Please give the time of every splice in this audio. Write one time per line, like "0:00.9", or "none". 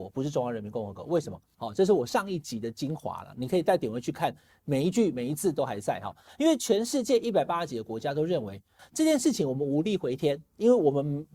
0:01.5
0:06.3
0:08.8